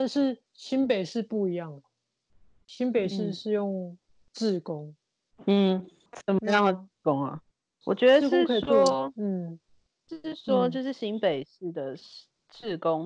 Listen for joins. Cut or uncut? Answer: cut